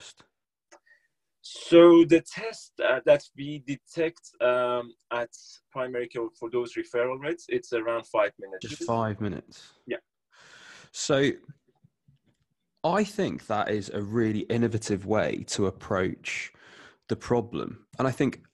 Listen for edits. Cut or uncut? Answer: cut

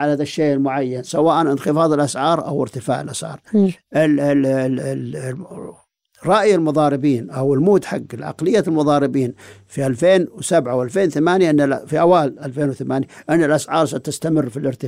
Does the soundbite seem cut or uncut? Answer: uncut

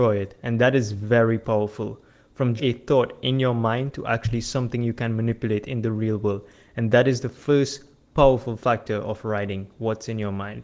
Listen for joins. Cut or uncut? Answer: cut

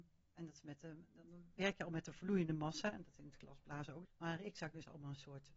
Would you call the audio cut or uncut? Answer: cut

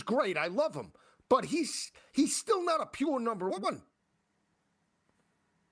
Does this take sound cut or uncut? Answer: uncut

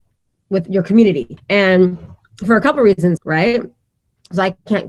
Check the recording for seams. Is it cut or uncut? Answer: cut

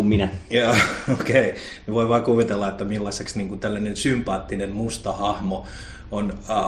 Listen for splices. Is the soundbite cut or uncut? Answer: uncut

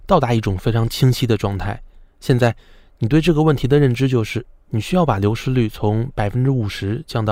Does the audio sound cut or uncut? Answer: cut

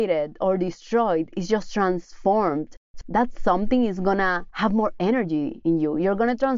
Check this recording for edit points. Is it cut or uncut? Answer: cut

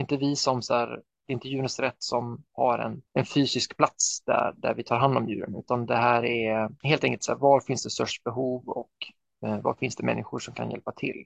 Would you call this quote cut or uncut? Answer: uncut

